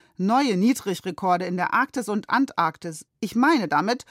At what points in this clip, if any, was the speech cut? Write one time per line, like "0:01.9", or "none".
0:03.1